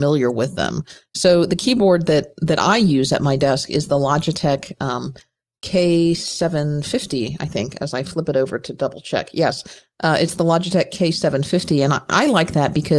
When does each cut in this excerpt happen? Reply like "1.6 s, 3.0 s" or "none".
none